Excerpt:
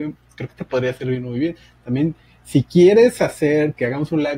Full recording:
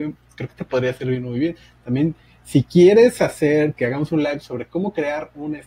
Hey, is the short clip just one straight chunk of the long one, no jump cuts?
yes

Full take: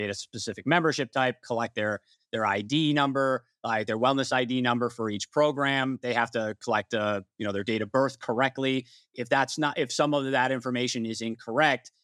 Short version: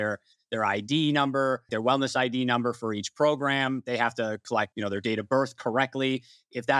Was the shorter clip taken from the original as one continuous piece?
no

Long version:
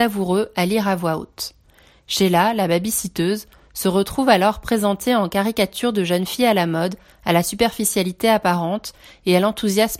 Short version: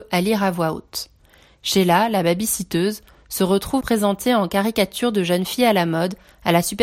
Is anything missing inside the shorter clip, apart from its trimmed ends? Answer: yes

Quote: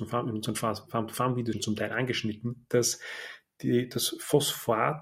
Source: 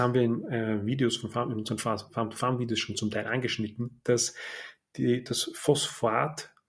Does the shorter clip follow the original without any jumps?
no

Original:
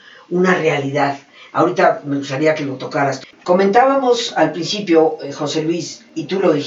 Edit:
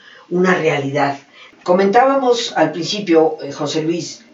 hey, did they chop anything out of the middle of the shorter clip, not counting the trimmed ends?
yes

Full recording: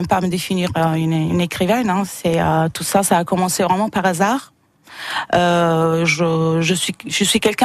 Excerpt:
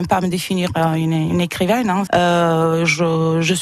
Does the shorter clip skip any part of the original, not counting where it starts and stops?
yes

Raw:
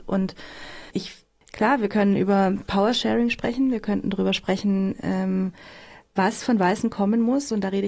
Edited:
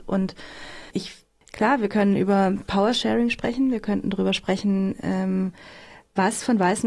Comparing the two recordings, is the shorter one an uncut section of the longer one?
yes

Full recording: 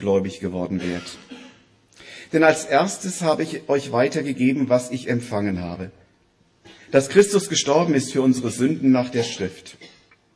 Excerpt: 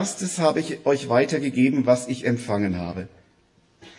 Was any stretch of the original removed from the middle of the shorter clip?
no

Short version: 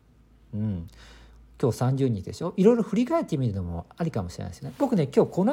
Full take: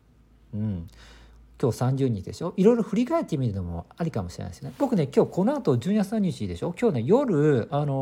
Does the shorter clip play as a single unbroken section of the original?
yes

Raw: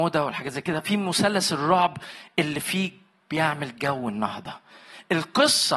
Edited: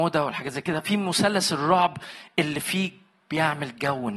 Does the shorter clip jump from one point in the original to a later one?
no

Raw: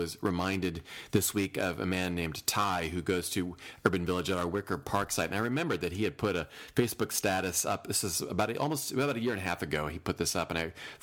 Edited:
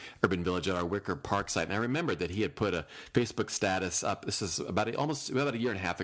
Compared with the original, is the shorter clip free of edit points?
yes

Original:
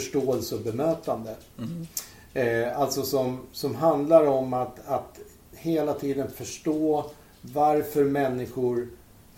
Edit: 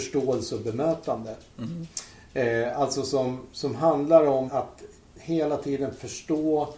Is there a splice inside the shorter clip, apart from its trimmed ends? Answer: yes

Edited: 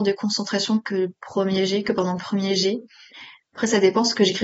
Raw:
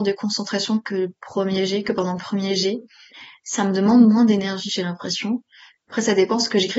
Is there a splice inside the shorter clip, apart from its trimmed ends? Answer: yes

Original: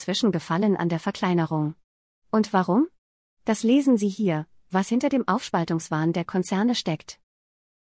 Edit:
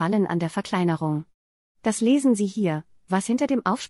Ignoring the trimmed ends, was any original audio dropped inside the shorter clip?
yes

